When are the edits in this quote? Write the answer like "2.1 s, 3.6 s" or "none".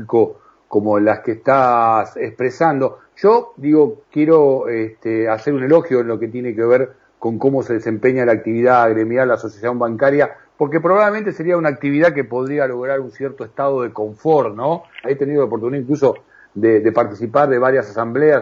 15.0 s